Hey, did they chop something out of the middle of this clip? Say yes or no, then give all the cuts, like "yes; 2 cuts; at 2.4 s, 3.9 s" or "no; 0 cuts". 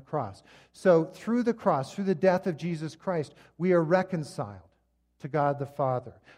no; 0 cuts